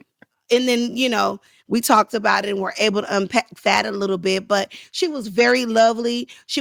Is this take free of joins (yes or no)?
yes